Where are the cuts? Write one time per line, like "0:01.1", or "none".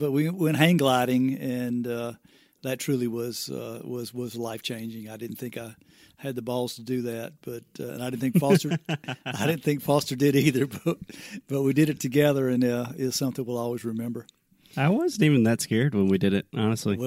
none